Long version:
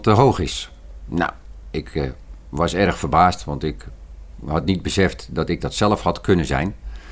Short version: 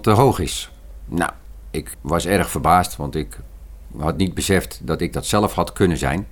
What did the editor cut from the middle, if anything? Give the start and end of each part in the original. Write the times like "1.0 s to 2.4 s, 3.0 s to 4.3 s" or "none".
1.9 s to 2.4 s